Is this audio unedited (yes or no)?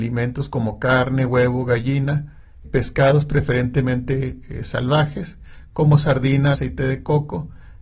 no